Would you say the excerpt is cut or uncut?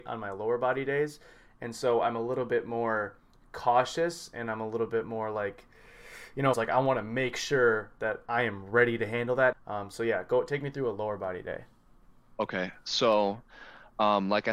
cut